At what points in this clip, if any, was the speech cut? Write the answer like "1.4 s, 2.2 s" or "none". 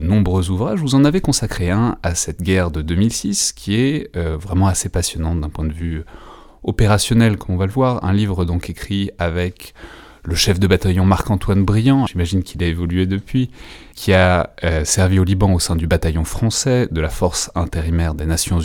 7.4 s, 12.1 s, 13.9 s